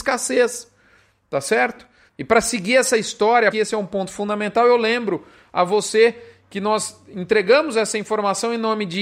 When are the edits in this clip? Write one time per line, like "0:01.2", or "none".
0:02.1
0:03.5